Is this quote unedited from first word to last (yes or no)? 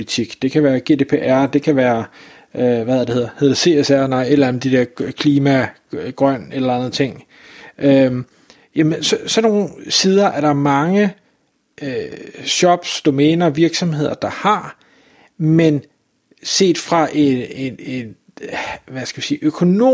yes